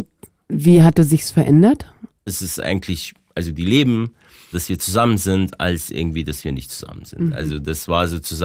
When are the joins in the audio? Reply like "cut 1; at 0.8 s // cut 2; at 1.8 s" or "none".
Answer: cut 1; at 2.3 s // cut 2; at 4.5 s